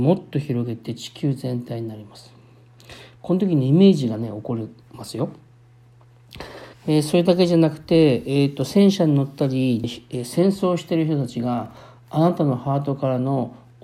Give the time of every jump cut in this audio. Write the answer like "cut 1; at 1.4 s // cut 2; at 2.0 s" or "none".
cut 1; at 3.2 s // cut 2; at 6.7 s // cut 3; at 9.8 s